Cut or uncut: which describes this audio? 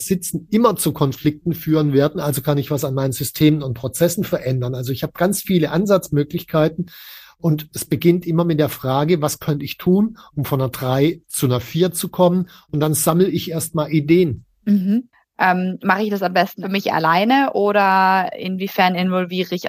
uncut